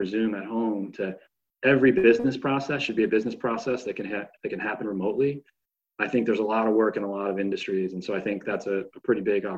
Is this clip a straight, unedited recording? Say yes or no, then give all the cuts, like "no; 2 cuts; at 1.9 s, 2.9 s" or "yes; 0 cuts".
yes; 0 cuts